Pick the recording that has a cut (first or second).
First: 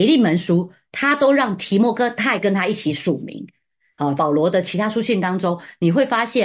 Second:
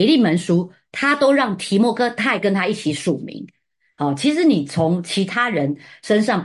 first